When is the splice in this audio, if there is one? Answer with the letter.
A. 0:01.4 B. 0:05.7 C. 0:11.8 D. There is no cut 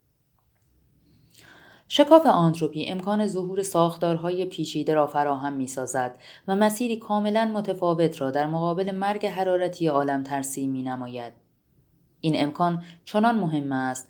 D